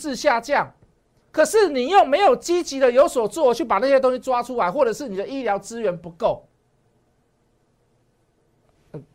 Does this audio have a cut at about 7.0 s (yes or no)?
no